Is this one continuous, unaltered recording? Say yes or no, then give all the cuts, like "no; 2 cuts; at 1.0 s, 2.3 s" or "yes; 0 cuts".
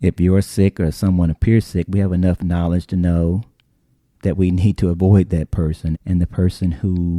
no; 1 cut; at 5.9 s